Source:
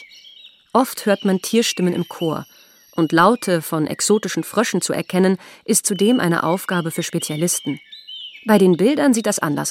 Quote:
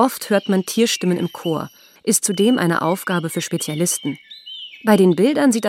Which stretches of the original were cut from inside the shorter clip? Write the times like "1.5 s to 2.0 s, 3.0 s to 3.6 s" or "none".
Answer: 2.7 s to 5.6 s